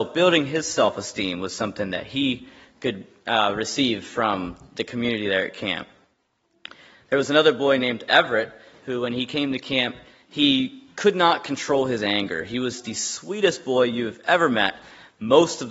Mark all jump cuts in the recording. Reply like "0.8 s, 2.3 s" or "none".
none